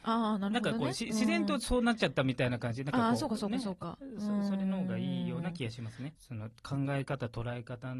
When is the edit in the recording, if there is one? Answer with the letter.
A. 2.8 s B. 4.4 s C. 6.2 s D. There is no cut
C